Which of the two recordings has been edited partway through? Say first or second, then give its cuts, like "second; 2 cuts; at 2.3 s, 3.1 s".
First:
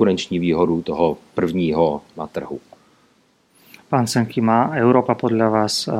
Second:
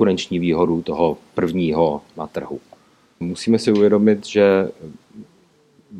second; 1 cut; at 3.2 s